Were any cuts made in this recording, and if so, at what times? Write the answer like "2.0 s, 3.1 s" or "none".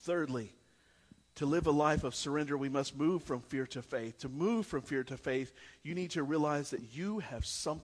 none